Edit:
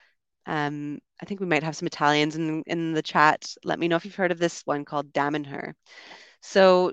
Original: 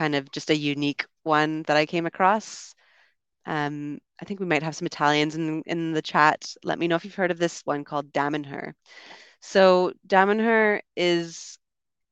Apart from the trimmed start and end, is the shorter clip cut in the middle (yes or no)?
no